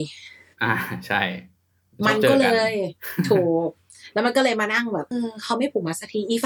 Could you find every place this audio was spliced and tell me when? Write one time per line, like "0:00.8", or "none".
0:05.1